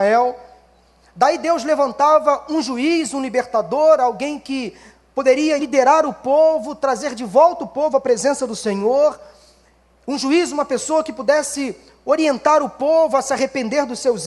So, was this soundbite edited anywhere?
yes; 1 cut; at 5.6 s

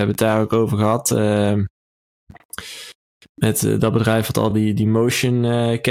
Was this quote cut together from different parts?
no; 0 cuts

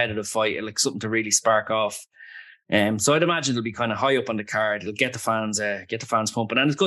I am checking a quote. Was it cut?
no; 0 cuts

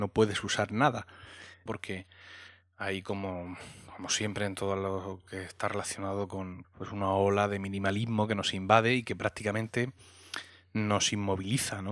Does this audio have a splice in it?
yes; 2 cuts; at 1.7 s, 6.6 s

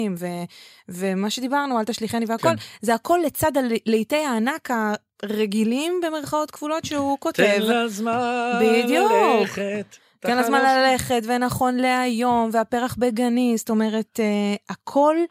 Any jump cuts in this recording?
no; 0 cuts

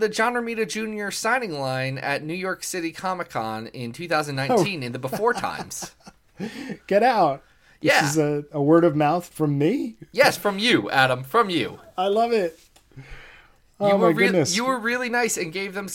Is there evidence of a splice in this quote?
yes; 1 cut; at 9.3 s

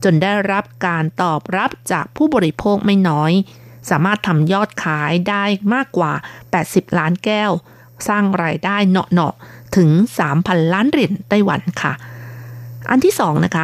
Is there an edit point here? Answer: no; 0 cuts

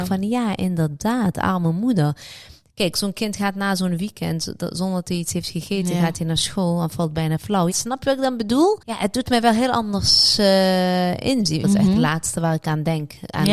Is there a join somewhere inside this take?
yes; 3 cuts; at 7.7 s, 8.8 s, 11.6 s

